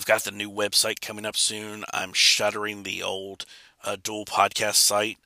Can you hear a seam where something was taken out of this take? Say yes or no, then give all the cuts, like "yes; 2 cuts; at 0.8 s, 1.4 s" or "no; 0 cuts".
no; 0 cuts